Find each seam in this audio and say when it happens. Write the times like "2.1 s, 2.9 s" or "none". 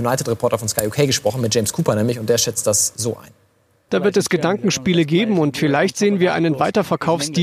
3.9 s